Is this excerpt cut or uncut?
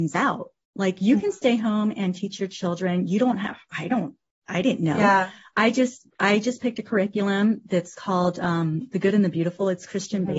uncut